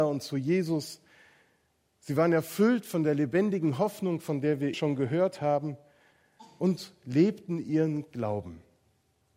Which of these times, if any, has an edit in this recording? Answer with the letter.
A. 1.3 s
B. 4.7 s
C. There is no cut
B